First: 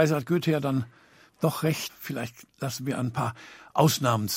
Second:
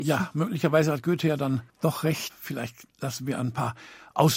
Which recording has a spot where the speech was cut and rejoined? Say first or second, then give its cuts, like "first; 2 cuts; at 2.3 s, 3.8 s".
second; 1 cut; at 1.7 s